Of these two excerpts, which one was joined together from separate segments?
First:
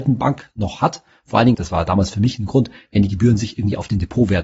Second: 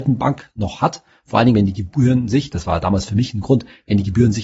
first; 1 cut; at 1.5 s

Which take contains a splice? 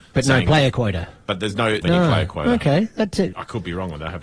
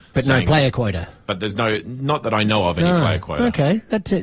first; 2 cuts; at 1.8 s, 3.3 s

